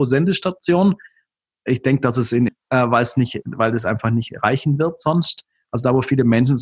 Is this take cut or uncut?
cut